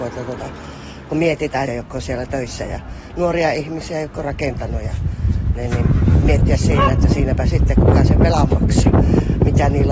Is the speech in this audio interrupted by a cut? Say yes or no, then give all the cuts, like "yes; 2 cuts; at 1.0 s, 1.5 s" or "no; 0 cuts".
yes; 1 cut; at 1.7 s